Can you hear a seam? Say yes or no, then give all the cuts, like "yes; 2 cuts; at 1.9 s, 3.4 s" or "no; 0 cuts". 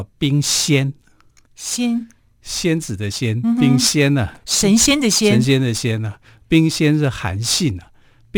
no; 0 cuts